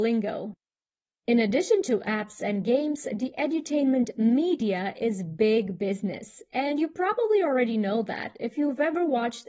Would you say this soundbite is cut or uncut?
uncut